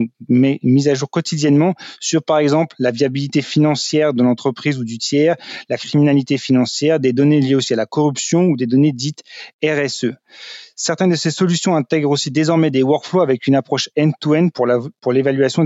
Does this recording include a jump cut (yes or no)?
no